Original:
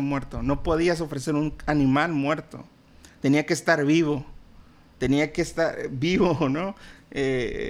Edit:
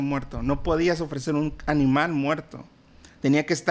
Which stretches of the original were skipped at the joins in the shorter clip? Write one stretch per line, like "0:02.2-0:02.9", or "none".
none